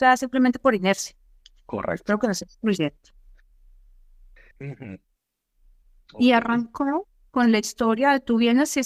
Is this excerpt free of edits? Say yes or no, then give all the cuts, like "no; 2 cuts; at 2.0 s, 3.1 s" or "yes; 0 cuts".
no; 1 cut; at 4.5 s